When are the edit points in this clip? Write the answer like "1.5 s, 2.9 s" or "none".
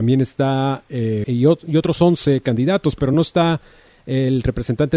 1.2 s